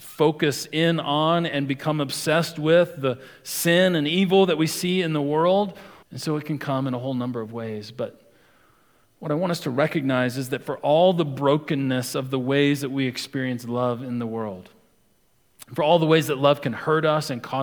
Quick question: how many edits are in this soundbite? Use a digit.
1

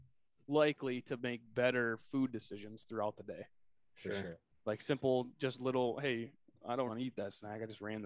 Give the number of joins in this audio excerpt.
1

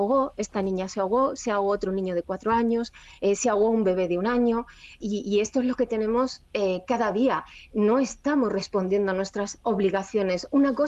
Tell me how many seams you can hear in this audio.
1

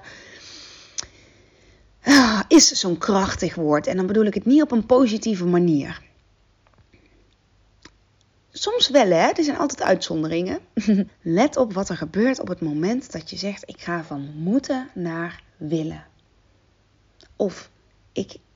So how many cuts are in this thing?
2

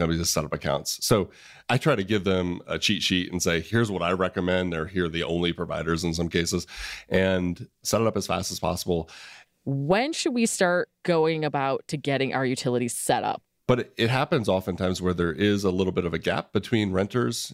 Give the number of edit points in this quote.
2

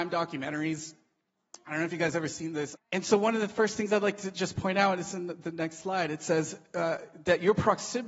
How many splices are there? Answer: 1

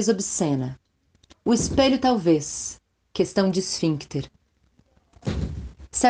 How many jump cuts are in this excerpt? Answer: 1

